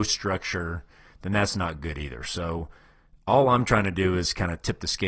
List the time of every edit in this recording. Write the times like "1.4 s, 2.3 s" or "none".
none